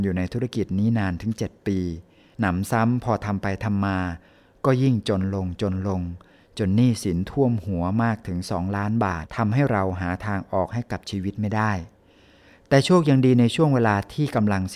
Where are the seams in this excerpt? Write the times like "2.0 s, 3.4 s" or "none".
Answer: 9.3 s